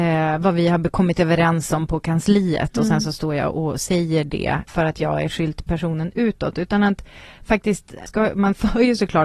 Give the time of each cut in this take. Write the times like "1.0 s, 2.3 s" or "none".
4.7 s, 8.1 s